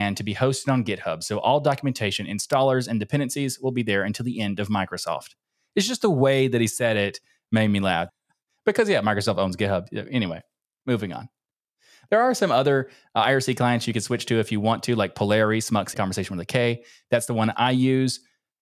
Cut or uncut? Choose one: cut